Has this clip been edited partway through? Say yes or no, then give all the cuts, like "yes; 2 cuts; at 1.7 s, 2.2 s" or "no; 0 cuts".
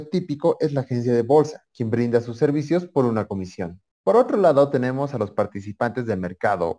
yes; 1 cut; at 3.9 s